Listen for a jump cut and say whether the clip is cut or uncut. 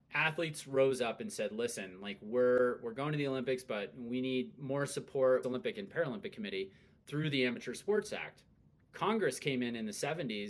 cut